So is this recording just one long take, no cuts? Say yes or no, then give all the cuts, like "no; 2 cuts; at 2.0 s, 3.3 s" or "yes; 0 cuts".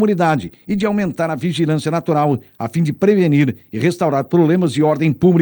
yes; 0 cuts